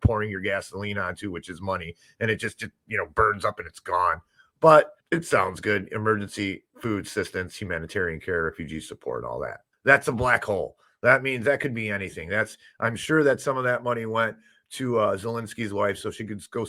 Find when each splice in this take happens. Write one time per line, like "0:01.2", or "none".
0:05.0
0:09.7